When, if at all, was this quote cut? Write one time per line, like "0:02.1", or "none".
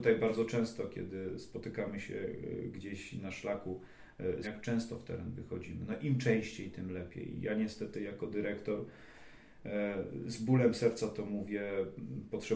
0:04.4